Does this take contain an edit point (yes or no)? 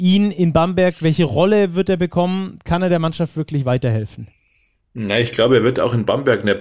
no